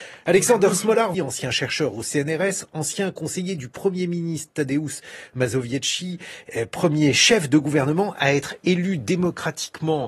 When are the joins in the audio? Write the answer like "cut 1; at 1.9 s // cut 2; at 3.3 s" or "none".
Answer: cut 1; at 1.1 s